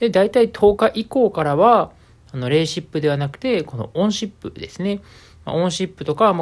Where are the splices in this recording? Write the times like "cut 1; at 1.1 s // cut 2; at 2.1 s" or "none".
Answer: none